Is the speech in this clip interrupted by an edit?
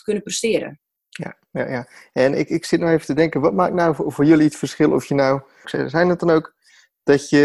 yes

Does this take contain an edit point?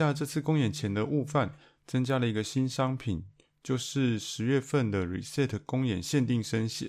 no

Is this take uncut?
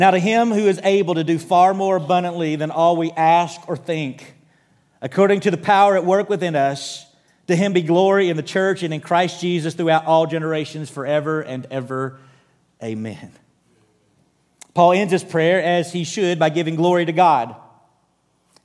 yes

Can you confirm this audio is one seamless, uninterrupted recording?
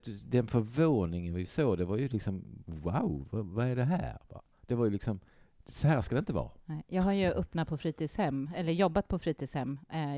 yes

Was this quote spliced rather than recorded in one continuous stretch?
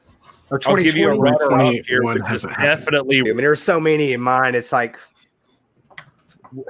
yes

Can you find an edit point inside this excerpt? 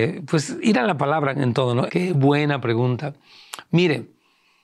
yes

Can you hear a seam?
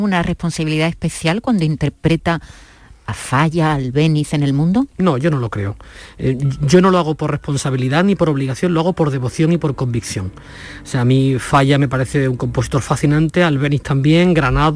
no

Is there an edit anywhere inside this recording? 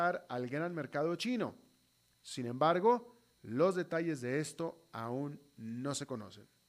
no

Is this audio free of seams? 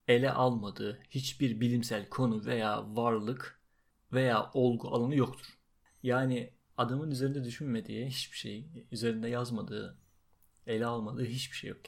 yes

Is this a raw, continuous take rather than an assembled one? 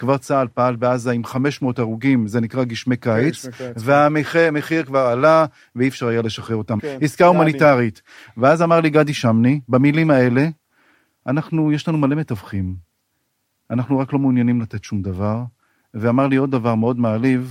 no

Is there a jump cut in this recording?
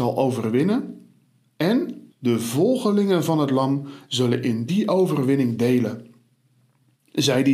yes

